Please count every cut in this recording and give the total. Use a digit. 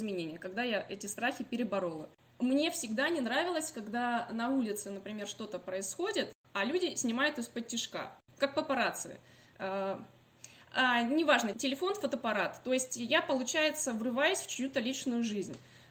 1